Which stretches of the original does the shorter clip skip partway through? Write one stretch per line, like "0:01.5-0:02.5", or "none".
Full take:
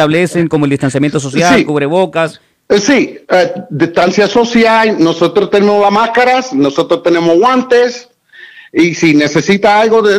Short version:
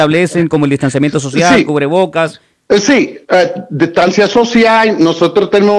none